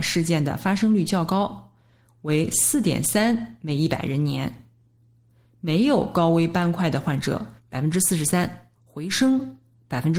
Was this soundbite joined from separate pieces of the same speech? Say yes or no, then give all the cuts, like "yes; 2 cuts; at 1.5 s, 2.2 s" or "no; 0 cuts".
yes; 2 cuts; at 7.6 s, 8.7 s